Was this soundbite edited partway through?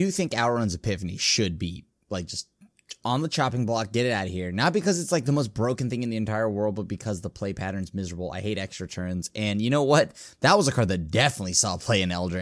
no; 0 cuts

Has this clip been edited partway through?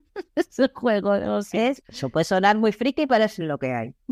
yes; 1 cut; at 1.8 s

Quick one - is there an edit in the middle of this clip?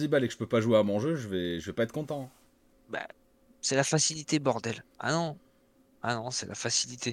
yes; 2 cuts; at 2.7 s, 4.9 s

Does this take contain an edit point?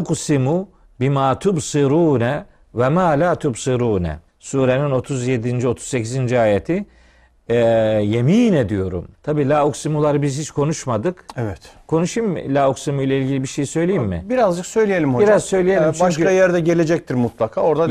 yes; 2 cuts; at 4.3 s, 9.1 s

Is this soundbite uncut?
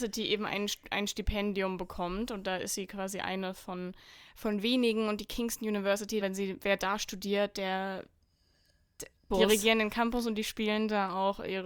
no; 2 cuts; at 6.2 s, 9.3 s

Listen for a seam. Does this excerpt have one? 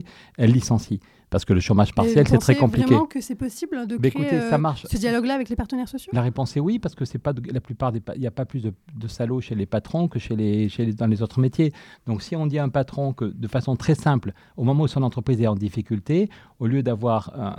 no; 0 cuts

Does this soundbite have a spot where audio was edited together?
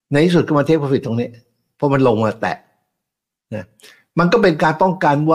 no; 0 cuts

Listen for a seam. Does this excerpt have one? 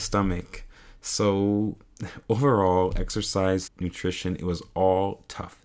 yes; 1 cut; at 3.7 s

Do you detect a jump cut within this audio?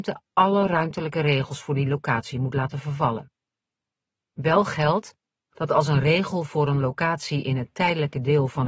yes; 1 cut; at 4.3 s

